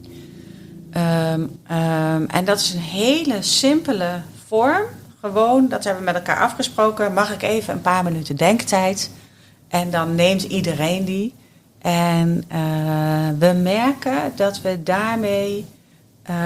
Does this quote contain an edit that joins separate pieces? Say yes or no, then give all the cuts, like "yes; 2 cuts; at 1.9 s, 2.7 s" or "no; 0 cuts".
yes; 1 cut; at 1.6 s